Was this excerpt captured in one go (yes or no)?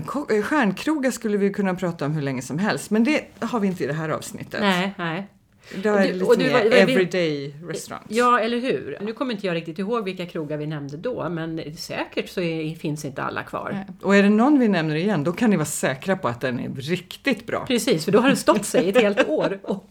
no